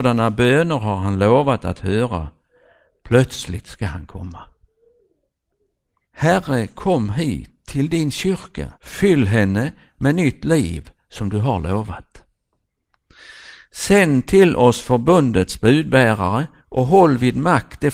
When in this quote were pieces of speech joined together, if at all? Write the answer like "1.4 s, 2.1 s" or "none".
6.0 s, 8.8 s